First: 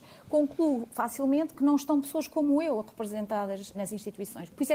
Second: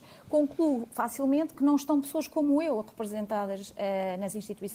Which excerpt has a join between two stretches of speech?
first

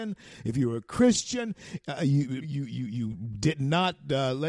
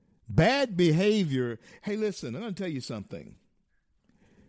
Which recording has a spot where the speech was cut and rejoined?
first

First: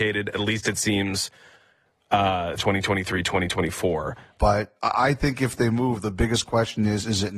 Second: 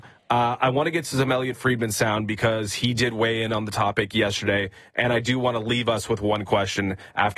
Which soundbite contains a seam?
first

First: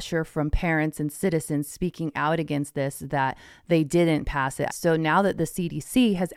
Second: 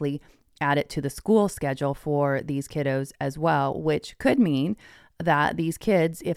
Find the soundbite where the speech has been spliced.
first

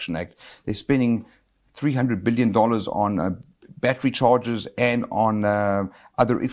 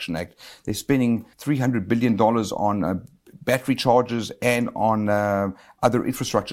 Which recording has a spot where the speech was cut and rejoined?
second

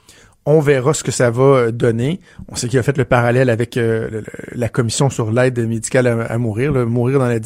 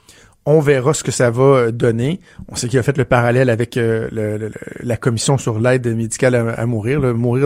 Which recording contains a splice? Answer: first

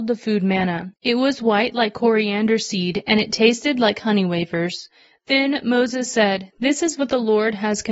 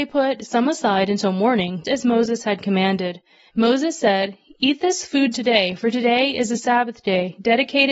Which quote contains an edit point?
second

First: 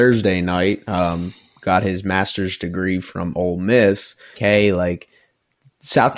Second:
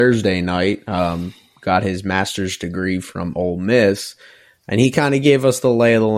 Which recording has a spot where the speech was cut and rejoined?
first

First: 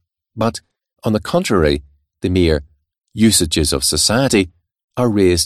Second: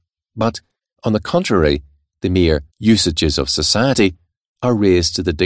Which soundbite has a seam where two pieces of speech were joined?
second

